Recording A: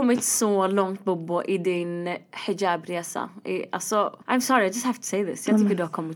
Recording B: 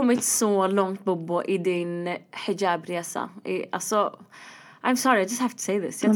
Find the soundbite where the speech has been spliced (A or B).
A